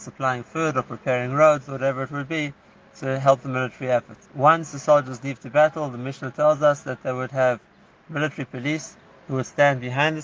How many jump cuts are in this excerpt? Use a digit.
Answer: 1